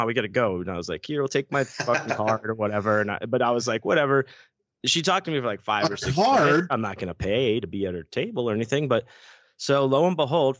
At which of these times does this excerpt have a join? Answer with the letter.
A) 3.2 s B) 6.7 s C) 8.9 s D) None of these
B